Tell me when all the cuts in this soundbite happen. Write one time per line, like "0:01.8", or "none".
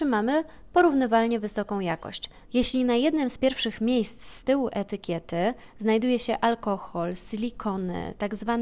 0:02.4